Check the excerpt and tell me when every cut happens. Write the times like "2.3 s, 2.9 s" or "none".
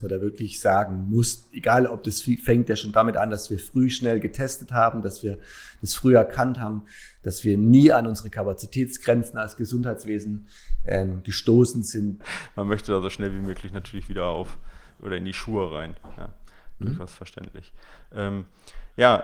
12.2 s